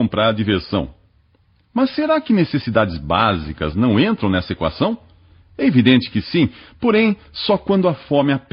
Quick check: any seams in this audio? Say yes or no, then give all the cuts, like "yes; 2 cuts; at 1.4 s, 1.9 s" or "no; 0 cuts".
no; 0 cuts